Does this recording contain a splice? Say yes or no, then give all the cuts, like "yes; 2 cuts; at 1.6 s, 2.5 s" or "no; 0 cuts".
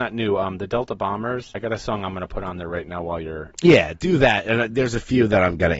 yes; 1 cut; at 1.5 s